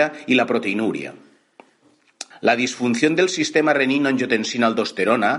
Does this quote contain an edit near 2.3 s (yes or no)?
yes